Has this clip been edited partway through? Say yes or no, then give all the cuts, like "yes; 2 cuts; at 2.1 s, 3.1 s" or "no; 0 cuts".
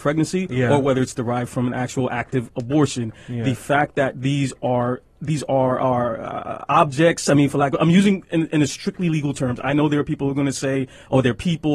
yes; 1 cut; at 5.1 s